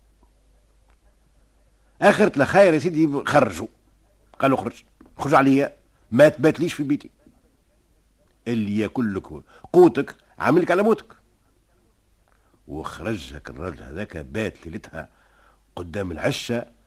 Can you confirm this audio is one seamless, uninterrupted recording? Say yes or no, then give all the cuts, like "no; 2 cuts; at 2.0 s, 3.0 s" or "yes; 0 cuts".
yes; 0 cuts